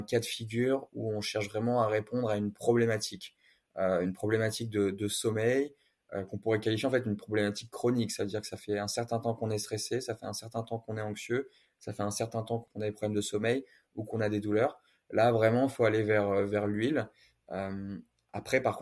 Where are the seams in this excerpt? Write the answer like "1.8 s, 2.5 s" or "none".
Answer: none